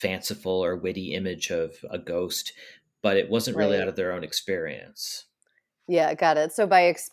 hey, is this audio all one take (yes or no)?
yes